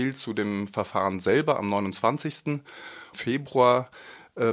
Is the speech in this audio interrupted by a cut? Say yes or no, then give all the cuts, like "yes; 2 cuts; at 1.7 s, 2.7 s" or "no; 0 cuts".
yes; 1 cut; at 3.1 s